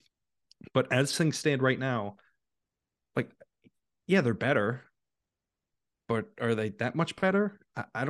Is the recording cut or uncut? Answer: uncut